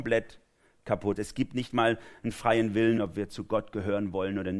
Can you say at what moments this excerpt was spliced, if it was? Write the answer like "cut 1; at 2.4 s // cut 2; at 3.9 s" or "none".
cut 1; at 1.2 s // cut 2; at 3.0 s